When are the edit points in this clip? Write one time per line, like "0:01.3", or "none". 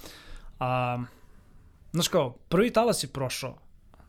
none